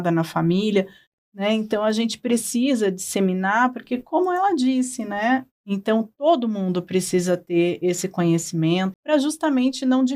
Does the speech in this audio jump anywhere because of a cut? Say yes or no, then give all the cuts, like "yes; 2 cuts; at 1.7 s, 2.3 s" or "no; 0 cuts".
yes; 2 cuts; at 5.5 s, 8.9 s